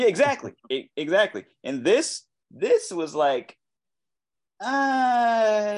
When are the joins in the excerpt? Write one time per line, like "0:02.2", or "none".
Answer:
none